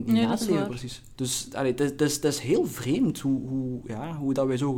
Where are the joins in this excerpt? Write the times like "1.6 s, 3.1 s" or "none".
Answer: 1.1 s